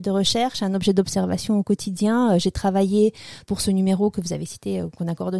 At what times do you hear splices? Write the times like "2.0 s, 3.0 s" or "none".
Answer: 3.4 s